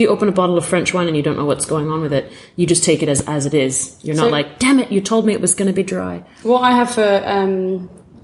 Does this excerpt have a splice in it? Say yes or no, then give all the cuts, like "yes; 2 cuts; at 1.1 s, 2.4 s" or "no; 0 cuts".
no; 0 cuts